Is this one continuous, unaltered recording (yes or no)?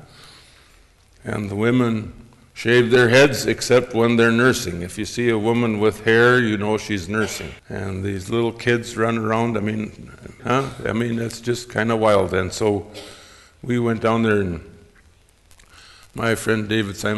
no